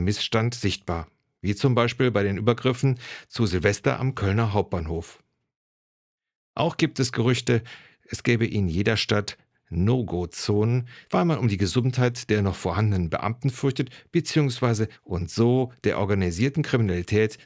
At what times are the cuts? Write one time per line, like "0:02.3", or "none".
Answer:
0:11.0
0:14.9